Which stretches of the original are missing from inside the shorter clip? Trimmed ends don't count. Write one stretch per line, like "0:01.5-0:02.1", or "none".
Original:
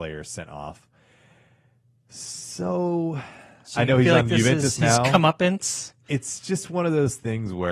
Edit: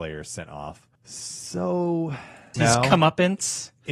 0:01.0-0:02.0
0:03.6-0:04.8

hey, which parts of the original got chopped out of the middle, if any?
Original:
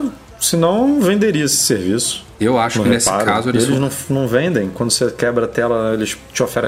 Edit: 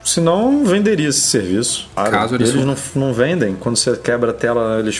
0:02.3-0:03.1

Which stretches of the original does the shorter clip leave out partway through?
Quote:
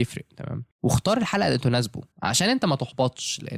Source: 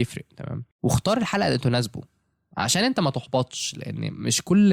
0:02.1-0:02.5

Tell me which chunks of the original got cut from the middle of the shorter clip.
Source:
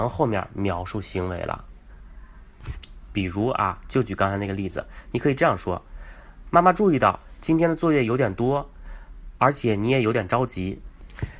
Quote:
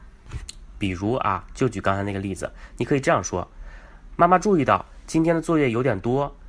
none

